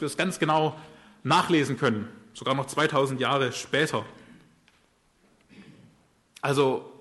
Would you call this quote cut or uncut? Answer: uncut